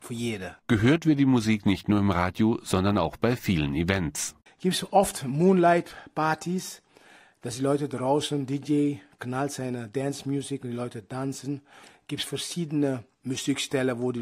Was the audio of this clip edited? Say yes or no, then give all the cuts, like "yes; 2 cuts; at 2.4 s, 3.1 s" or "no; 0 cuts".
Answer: no; 0 cuts